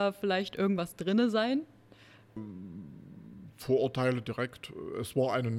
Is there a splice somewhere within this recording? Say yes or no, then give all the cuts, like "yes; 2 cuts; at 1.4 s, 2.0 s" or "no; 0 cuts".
yes; 1 cut; at 2.4 s